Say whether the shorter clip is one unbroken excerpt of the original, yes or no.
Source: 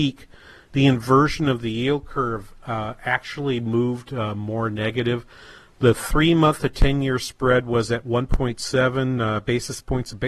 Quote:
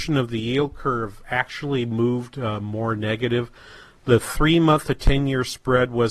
no